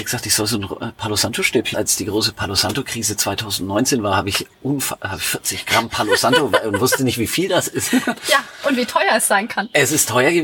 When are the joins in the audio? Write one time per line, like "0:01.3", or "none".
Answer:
0:01.7